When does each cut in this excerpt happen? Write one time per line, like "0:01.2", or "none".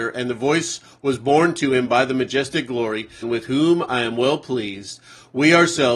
0:03.2